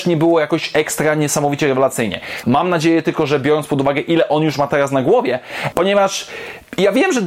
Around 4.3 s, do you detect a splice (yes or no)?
no